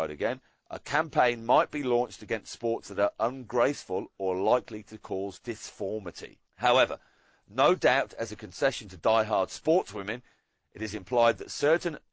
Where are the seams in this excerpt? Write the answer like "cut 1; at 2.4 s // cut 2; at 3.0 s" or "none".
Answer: cut 1; at 6.5 s